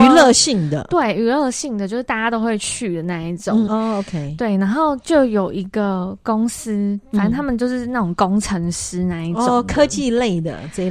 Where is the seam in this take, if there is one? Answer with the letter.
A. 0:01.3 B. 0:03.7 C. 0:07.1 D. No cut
B